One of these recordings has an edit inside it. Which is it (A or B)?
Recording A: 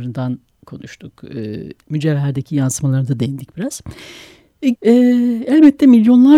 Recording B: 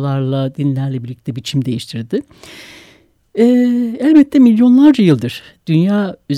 A